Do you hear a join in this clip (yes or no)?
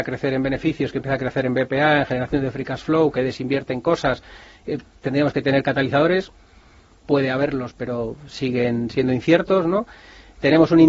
no